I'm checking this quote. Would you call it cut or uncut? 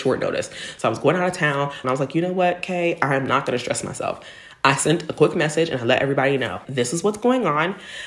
cut